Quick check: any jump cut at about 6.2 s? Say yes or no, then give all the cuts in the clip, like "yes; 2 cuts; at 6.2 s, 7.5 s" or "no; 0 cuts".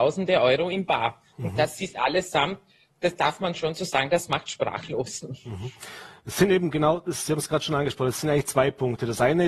no; 0 cuts